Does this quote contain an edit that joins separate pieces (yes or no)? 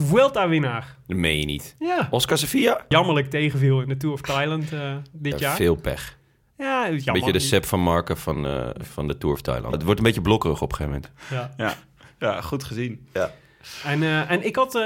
yes